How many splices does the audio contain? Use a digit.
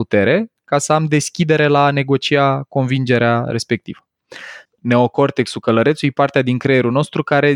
1